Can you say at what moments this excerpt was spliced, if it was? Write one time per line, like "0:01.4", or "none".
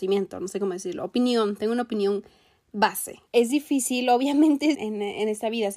0:03.3
0:04.7